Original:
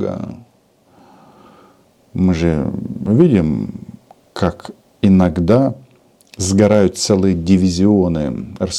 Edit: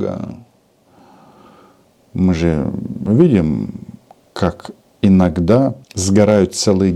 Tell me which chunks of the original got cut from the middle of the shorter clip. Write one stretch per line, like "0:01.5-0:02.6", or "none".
0:05.8-0:06.3